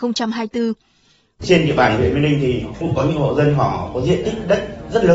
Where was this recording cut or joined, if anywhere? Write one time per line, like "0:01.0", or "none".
0:01.4